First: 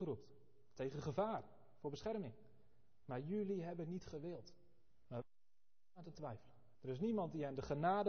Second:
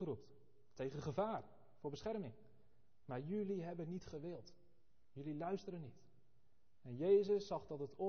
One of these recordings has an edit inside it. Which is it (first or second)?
first